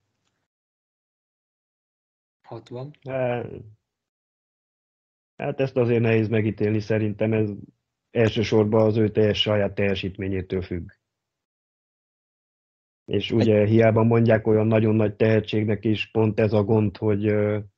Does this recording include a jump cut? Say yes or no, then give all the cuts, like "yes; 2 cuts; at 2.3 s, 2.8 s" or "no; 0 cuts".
no; 0 cuts